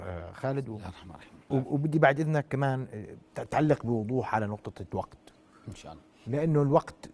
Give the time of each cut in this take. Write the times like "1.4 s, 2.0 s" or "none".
1.5 s